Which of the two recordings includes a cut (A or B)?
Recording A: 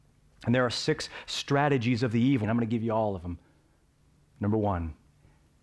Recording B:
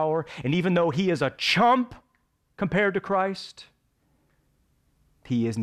A